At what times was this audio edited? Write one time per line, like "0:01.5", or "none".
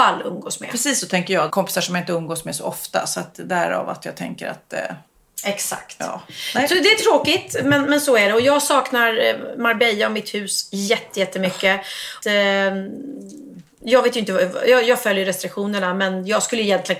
0:01.5
0:12.2